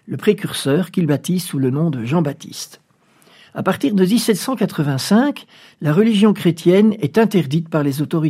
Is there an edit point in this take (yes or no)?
no